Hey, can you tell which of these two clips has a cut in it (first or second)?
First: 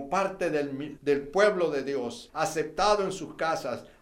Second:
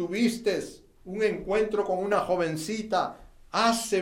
first